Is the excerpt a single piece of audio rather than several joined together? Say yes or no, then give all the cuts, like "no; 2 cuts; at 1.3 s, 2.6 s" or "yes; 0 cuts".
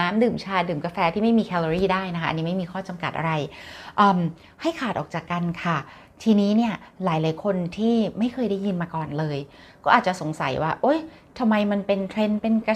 yes; 0 cuts